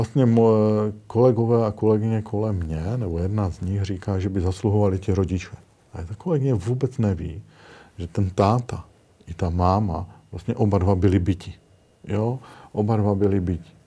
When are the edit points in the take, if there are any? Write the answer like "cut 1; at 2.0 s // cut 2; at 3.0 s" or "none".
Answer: none

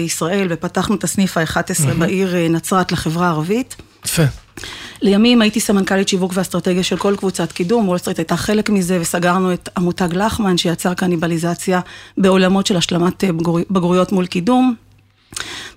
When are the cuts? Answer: none

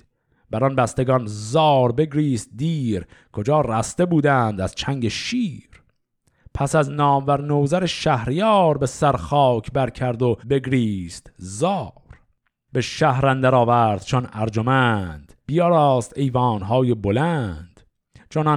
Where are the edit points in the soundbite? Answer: cut 1; at 10.4 s // cut 2; at 15.4 s

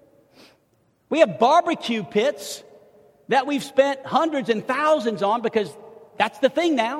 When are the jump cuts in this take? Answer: none

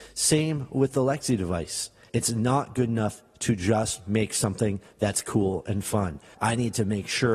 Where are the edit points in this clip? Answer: cut 1; at 2.1 s // cut 2; at 6.3 s

